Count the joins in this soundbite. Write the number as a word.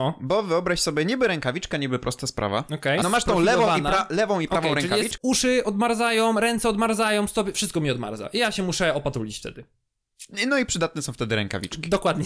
two